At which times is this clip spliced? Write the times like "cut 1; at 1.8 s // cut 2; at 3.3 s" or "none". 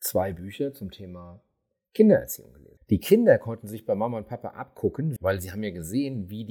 cut 1; at 2.8 s // cut 2; at 5.2 s

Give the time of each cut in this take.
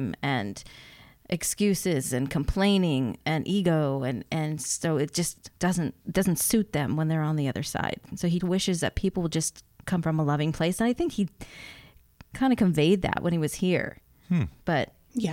cut 1; at 6.0 s // cut 2; at 8.4 s

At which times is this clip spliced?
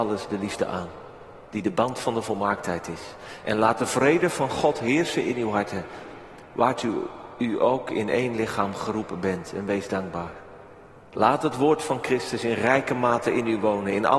none

